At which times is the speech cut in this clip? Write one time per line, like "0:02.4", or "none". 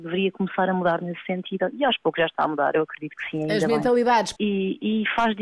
0:04.4